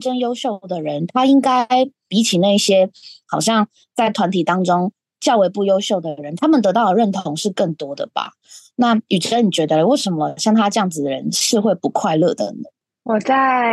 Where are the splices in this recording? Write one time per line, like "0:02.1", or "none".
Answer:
0:02.1